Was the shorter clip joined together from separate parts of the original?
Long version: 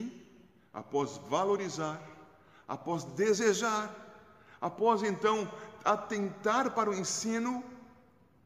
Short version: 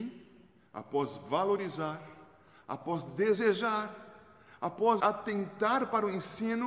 yes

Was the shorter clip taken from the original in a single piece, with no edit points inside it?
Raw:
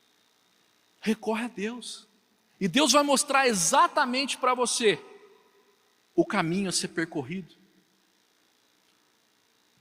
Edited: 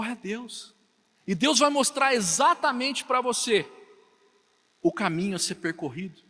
yes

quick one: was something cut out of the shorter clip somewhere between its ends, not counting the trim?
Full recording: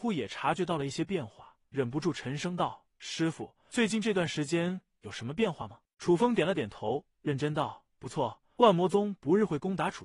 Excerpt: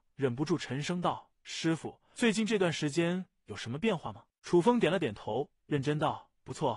no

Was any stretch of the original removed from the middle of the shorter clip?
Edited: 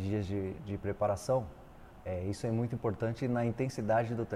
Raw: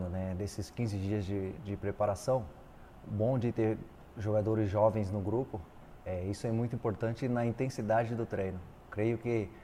yes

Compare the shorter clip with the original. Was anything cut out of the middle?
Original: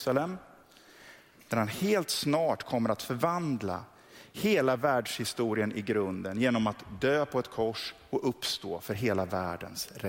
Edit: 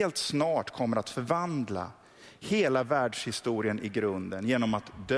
no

